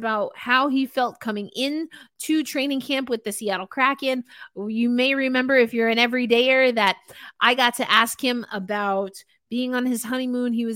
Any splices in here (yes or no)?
no